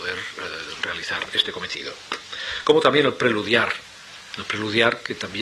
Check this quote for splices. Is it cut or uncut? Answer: uncut